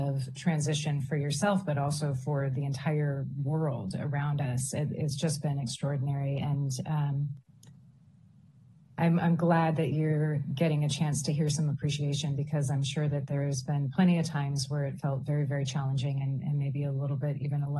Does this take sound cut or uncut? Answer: uncut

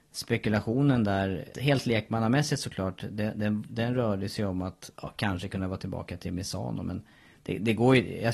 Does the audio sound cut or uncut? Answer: cut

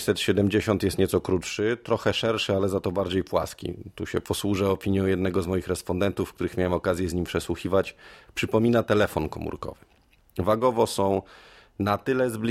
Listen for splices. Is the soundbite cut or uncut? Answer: uncut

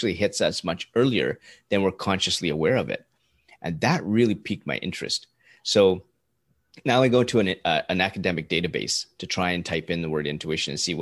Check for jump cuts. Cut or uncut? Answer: uncut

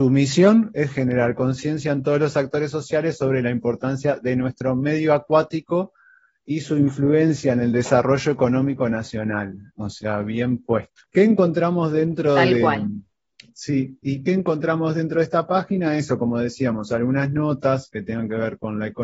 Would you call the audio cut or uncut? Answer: uncut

